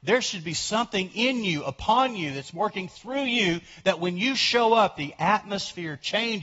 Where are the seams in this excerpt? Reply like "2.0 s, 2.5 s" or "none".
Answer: none